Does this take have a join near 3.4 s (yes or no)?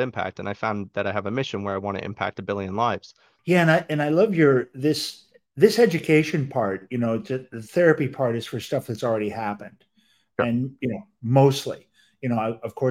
yes